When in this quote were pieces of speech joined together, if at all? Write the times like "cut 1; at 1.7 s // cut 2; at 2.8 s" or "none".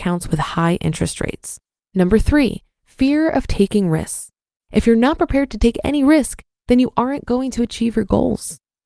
cut 1; at 1.8 s // cut 2; at 4.6 s